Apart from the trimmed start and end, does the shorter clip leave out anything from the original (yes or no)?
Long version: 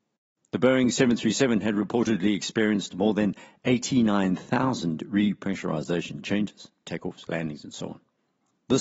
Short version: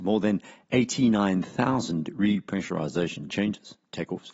no